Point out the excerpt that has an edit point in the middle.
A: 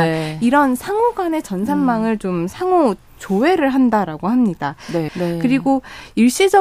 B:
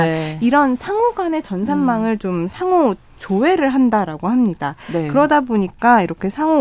A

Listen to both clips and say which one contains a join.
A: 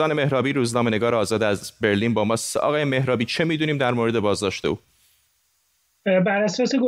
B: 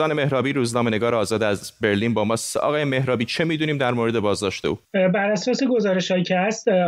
B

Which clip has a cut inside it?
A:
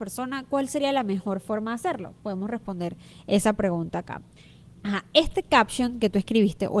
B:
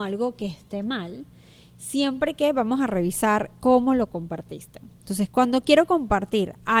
A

